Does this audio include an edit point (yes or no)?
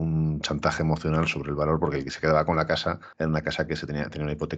yes